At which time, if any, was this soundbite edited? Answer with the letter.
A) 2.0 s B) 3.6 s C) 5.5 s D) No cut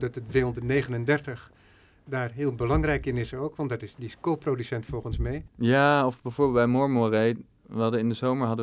C